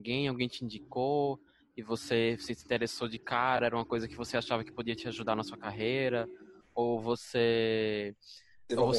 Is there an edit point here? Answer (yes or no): no